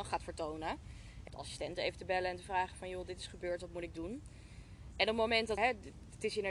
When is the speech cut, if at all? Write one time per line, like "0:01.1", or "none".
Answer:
0:01.3
0:05.6

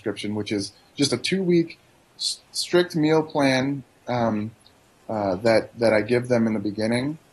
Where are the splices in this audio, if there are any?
none

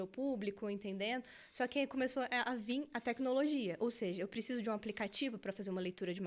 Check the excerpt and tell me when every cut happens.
none

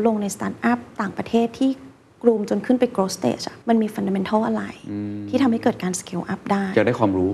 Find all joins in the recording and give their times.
0:03.6

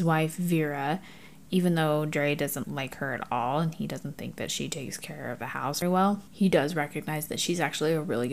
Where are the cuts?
0:02.6
0:05.8

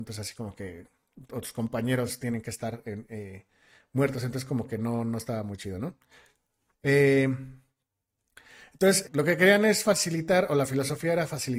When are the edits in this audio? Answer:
0:06.7
0:09.1

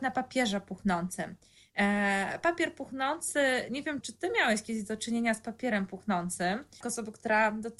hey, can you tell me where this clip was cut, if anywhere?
0:04.0
0:06.8

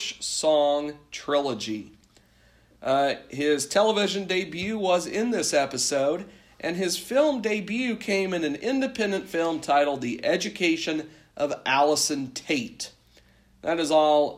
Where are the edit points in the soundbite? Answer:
none

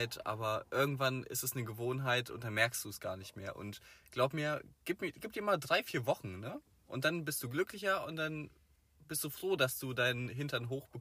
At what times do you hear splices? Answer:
none

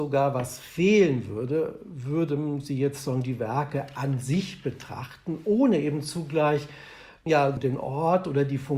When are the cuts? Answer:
0:07.6

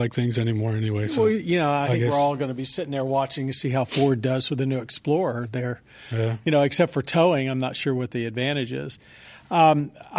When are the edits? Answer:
none

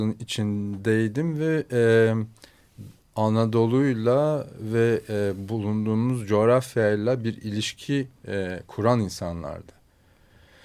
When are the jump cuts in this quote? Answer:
0:03.0

